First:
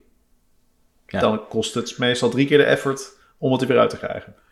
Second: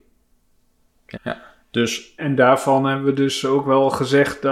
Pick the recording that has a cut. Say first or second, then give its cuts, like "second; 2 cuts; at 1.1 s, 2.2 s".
second; 2 cuts; at 1.1 s, 2.2 s